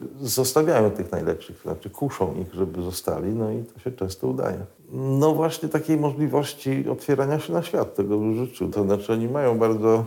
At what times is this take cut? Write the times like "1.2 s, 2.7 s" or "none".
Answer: 4.8 s, 8.7 s